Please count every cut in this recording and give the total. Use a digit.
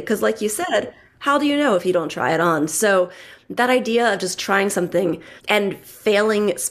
1